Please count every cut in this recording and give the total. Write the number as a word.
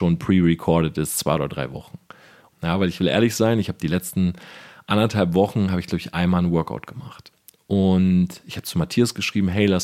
one